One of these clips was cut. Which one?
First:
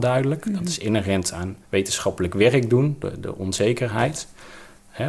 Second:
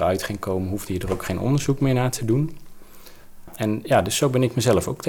first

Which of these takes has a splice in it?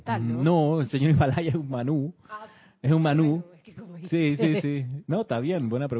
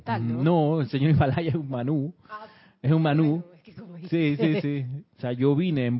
second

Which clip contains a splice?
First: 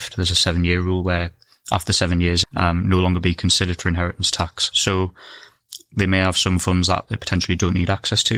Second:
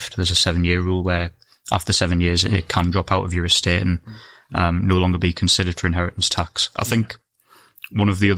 first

